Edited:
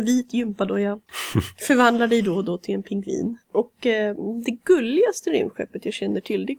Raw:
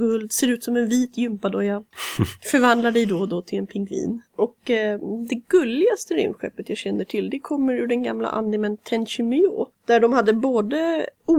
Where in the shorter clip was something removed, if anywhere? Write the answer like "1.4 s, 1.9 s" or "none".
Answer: none